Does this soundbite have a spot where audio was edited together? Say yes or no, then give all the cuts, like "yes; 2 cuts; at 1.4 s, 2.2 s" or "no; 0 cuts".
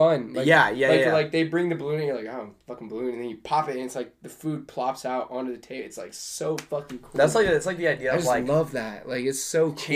no; 0 cuts